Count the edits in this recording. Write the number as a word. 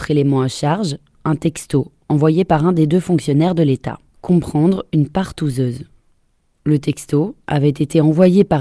one